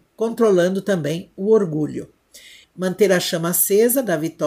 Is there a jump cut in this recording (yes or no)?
yes